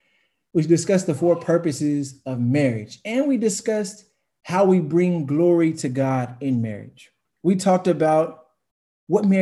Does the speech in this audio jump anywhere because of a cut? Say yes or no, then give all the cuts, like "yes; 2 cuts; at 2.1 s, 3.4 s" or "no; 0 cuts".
yes; 1 cut; at 7.2 s